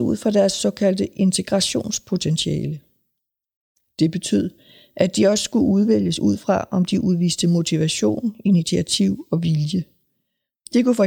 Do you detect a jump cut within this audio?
no; 0 cuts

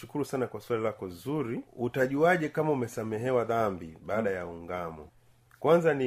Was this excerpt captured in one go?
no; 1 cut; at 1.7 s

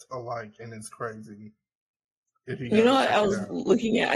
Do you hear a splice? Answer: no; 0 cuts

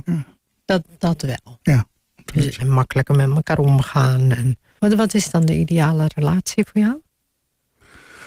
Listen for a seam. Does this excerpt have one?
yes; 2 cuts; at 2.6 s, 4.8 s

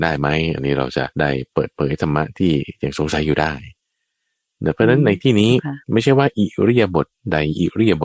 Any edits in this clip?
yes; 2 cuts; at 1.1 s, 5.8 s

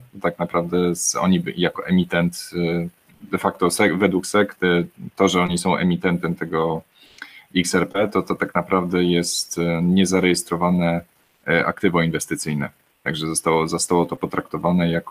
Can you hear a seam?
no; 0 cuts

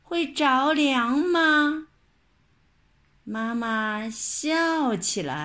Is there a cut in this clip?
no; 0 cuts

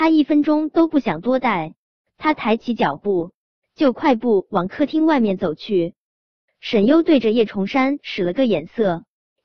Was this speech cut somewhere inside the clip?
no; 0 cuts

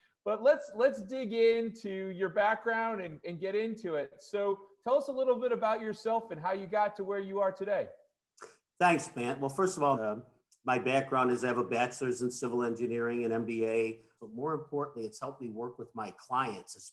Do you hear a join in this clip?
yes; 2 cuts; at 9.9 s, 14.2 s

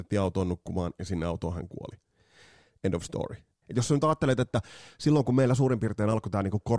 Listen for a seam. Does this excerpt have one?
yes; 1 cut; at 3.6 s

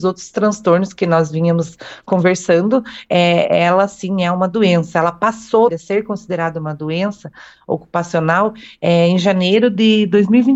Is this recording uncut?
no; 1 cut; at 5.7 s

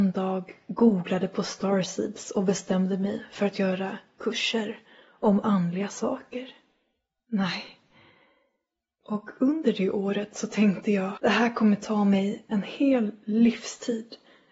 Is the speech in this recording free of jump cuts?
no; 2 cuts; at 9.0 s, 11.2 s

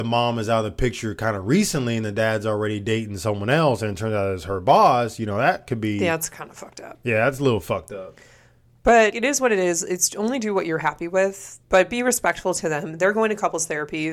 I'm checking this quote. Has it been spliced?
yes; 2 cuts; at 9.1 s, 11.6 s

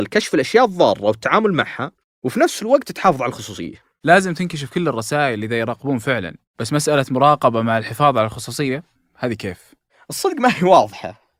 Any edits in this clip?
no; 0 cuts

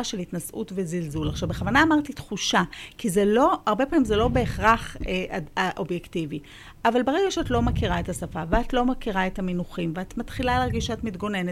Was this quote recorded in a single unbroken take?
yes; 0 cuts

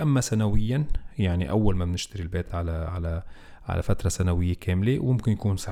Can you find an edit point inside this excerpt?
no; 0 cuts

